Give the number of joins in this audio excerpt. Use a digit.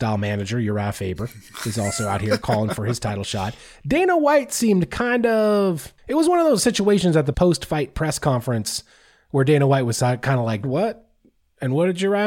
3